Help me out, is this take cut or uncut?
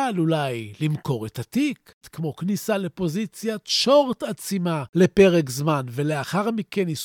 cut